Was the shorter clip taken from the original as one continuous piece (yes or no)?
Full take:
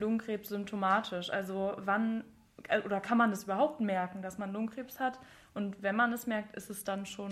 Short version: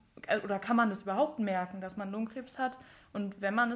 yes